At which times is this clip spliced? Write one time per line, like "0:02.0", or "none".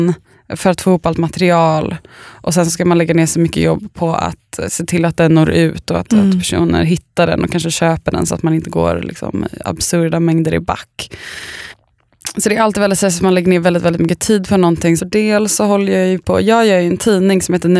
0:15.0